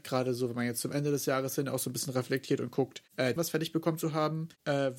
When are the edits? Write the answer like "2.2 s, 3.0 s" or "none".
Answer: 3.4 s